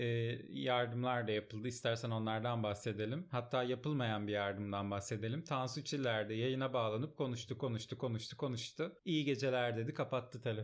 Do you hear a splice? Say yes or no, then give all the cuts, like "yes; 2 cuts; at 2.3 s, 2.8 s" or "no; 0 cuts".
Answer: yes; 1 cut; at 9.0 s